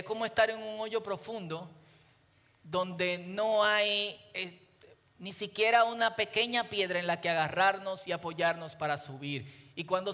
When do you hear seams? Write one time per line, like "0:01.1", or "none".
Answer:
none